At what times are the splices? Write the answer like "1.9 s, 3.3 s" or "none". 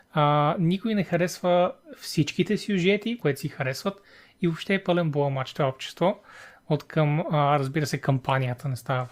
3.2 s

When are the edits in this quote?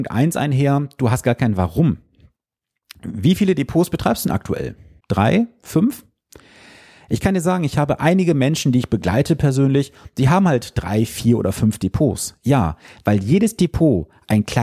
5.0 s

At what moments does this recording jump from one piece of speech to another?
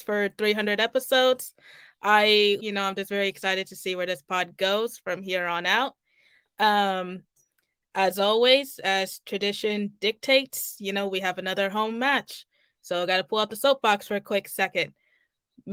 2.6 s

